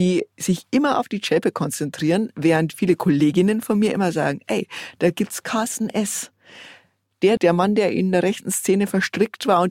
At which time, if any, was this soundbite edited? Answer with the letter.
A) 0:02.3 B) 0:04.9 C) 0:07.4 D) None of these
C